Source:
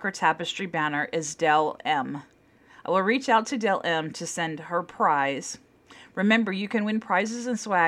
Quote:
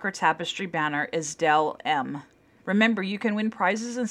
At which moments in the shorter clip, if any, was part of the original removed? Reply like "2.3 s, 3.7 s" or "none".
2.6 s